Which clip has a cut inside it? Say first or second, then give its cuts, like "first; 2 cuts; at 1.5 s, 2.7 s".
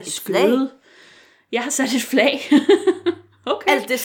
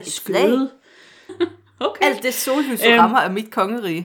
second; 1 cut; at 1.3 s